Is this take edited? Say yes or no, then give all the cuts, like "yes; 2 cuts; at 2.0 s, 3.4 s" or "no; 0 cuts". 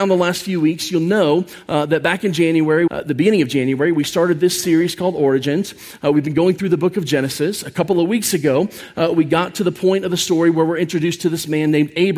yes; 1 cut; at 2.9 s